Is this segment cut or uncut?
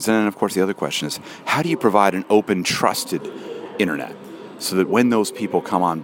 uncut